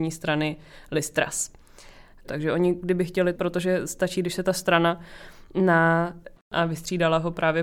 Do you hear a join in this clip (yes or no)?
yes